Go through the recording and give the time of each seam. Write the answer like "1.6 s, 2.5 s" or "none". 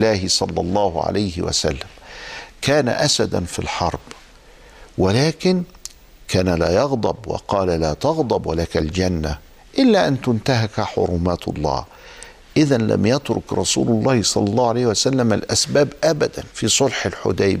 16.5 s